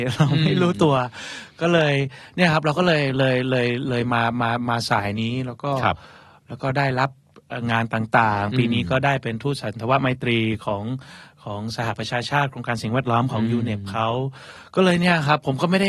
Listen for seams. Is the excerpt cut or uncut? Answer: uncut